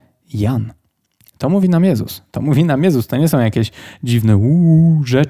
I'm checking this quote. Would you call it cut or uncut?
uncut